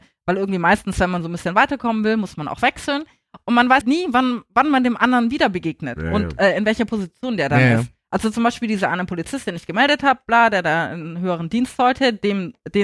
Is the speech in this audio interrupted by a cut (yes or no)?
yes